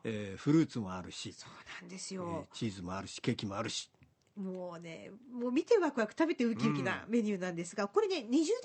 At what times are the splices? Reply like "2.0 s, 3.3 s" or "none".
none